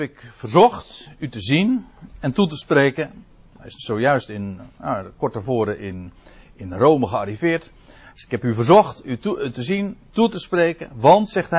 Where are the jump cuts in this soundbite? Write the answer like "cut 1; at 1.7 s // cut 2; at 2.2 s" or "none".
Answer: none

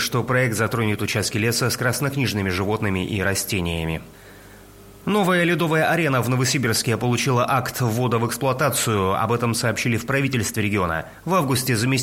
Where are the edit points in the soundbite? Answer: none

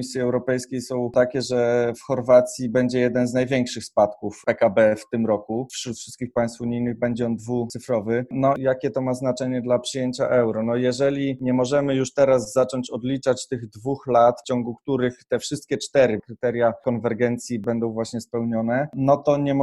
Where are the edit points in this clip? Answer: cut 1; at 16.2 s

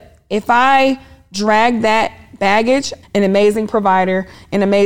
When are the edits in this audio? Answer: cut 1; at 3.0 s

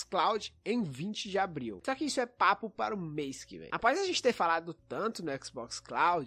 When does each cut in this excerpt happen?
cut 1; at 1.8 s

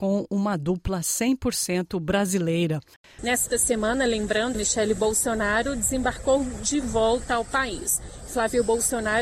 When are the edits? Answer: cut 1; at 3.2 s // cut 2; at 4.5 s

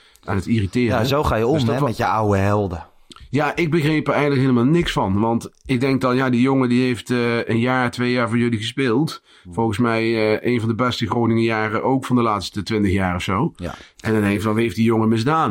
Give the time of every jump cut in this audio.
none

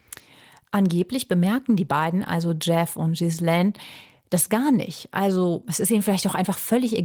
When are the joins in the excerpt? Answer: none

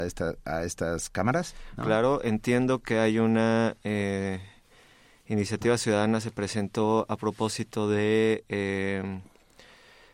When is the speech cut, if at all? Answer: cut 1; at 1.8 s

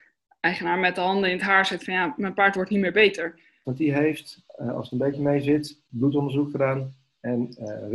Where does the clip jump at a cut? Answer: cut 1; at 3.6 s

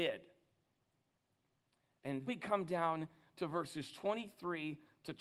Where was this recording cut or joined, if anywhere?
cut 1; at 2.3 s

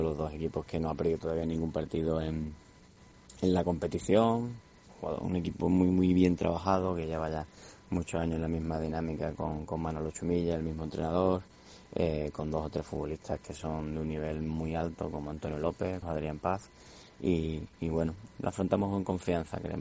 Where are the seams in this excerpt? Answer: cut 1; at 16.0 s // cut 2; at 18.3 s

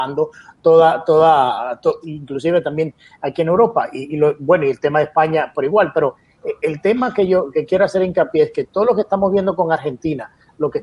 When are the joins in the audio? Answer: cut 1; at 2.0 s

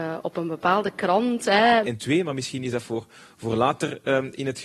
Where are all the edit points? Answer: cut 1; at 1.8 s

